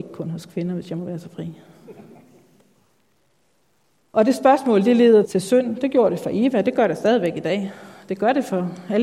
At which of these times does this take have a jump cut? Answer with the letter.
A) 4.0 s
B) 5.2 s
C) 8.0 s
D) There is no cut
B